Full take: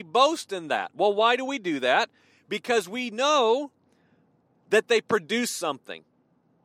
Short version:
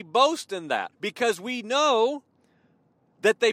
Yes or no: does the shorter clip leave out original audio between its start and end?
yes